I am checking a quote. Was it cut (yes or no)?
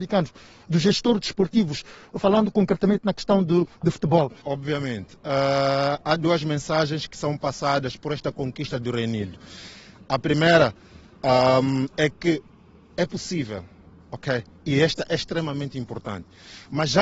yes